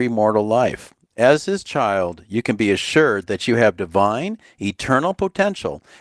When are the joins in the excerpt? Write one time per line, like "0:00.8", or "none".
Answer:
none